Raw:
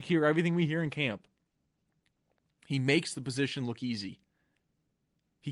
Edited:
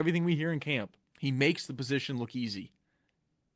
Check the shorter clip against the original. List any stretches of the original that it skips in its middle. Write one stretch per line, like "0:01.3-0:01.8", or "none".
0:01.4-0:02.5

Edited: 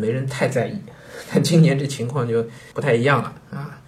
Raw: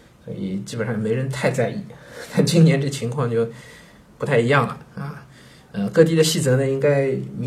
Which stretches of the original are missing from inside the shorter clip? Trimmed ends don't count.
0:03.7-0:04.2

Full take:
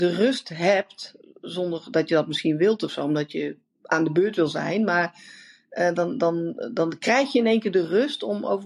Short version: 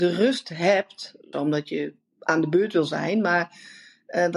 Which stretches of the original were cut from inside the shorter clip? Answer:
0:01.3-0:03.0

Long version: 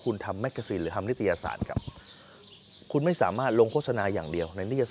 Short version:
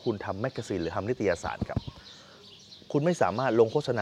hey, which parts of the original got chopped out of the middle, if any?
none

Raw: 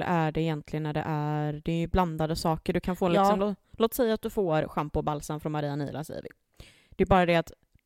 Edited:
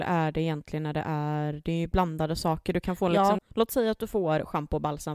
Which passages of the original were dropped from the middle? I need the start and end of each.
0:03.4-0:03.6

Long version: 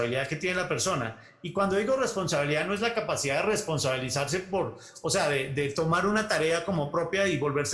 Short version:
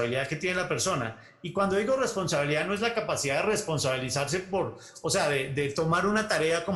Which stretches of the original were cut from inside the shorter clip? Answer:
none

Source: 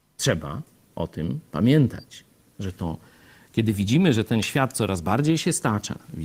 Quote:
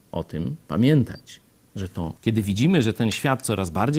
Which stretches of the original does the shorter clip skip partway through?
0:03.0-0:03.5

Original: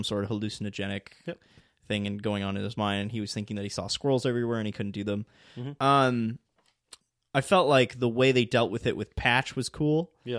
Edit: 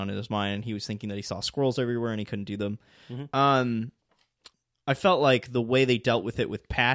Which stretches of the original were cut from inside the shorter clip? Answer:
none

